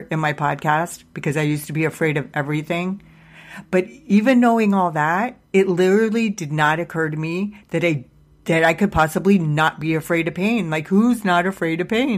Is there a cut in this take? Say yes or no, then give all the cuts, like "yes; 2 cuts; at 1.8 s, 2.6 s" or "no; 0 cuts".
no; 0 cuts